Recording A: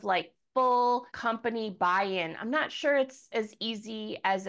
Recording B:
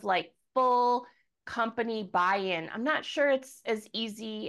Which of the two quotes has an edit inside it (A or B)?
A